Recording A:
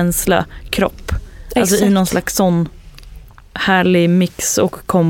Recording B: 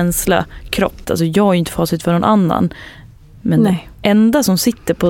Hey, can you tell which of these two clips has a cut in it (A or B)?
B